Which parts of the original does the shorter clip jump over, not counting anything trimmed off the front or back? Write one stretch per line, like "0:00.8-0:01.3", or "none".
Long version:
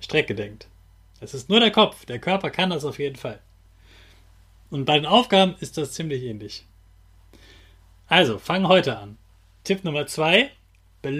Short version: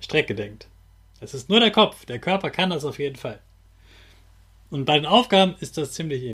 none